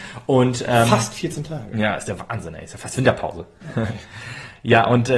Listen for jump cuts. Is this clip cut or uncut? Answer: uncut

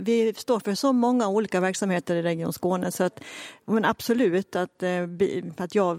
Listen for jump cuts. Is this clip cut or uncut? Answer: uncut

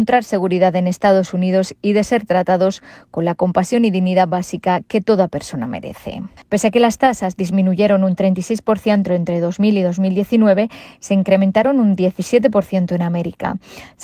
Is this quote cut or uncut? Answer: cut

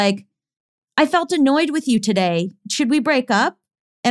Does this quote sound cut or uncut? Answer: uncut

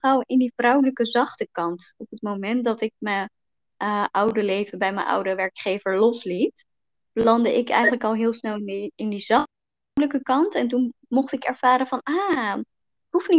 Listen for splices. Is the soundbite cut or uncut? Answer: uncut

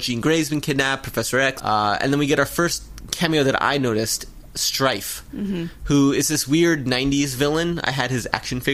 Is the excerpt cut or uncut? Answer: cut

